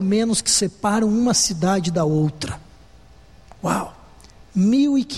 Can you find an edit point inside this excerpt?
no; 0 cuts

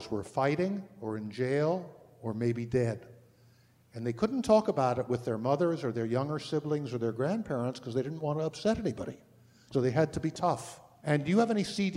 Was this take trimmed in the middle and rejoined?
yes; 1 cut; at 11.0 s

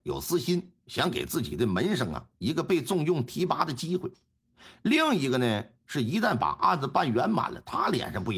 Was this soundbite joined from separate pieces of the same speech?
no; 0 cuts

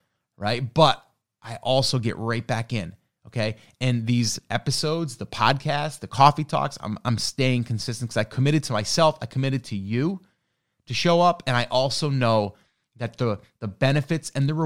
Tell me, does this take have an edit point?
no; 0 cuts

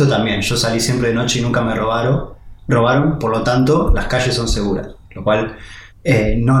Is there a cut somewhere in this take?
no; 0 cuts

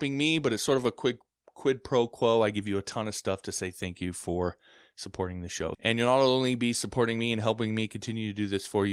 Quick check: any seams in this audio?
yes; 1 cut; at 5.7 s

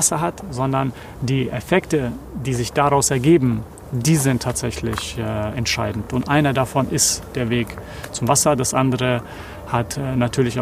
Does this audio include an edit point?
no; 0 cuts

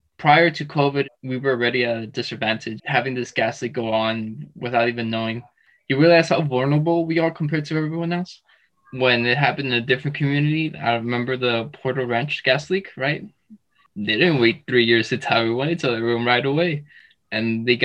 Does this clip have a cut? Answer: yes; 1 cut; at 2.8 s

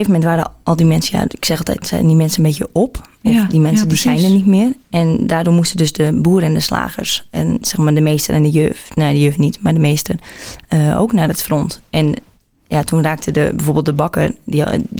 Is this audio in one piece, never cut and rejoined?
yes; 0 cuts

